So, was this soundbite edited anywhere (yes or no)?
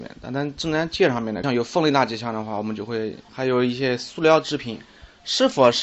yes